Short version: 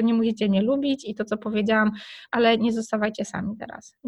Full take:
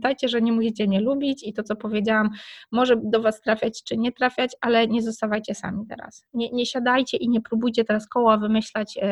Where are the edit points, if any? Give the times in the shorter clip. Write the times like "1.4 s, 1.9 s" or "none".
2.3 s